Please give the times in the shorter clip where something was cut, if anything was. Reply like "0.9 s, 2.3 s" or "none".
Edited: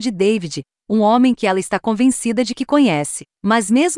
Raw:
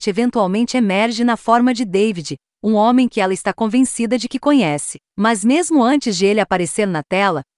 none